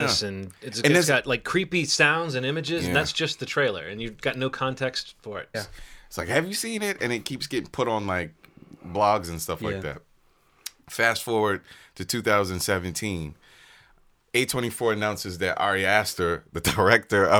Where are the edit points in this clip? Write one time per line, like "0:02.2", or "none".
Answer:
0:05.5